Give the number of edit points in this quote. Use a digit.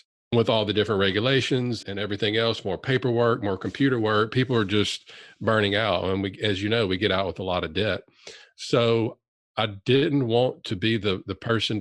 1